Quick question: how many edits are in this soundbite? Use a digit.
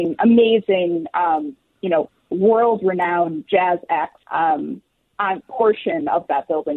2